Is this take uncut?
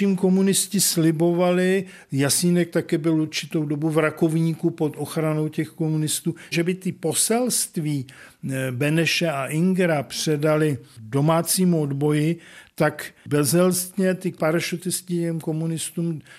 no; 1 cut; at 6.5 s

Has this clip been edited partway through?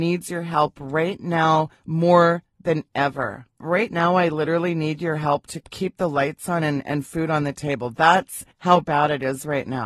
no; 0 cuts

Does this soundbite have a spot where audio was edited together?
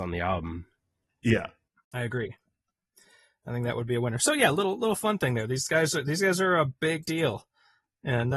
no; 0 cuts

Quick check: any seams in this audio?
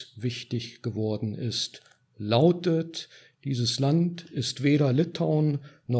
no; 0 cuts

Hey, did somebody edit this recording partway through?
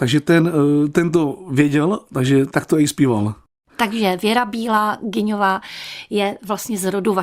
yes; 1 cut; at 3.7 s

